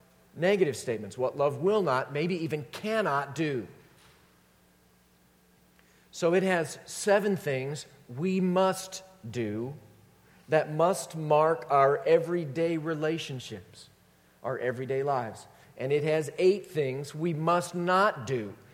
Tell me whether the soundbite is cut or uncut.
uncut